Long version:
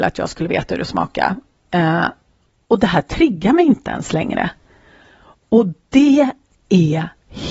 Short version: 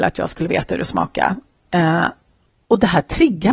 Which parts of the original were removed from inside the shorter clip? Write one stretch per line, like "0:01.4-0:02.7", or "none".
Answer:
none